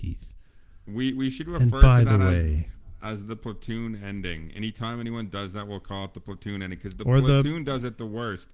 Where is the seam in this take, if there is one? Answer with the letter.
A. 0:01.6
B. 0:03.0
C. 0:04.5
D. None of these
D